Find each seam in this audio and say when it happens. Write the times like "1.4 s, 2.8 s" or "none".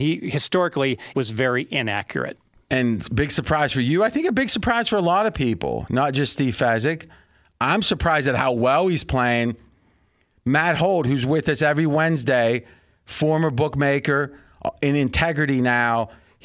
1.1 s